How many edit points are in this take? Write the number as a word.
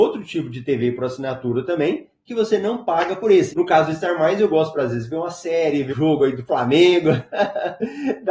two